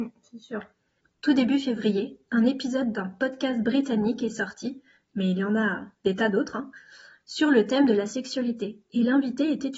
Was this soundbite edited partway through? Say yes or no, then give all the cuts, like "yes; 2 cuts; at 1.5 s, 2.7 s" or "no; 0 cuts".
yes; 1 cut; at 1.0 s